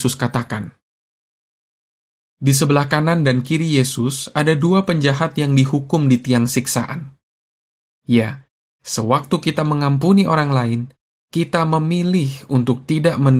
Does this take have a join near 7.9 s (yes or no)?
yes